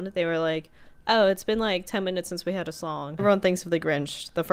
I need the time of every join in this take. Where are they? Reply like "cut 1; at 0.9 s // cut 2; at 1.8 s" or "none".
cut 1; at 3.2 s